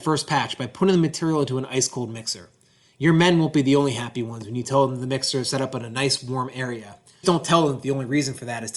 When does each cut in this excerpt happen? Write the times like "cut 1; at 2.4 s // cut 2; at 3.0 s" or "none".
cut 1; at 7.2 s